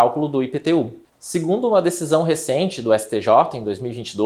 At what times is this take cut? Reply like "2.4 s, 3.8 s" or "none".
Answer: 1.1 s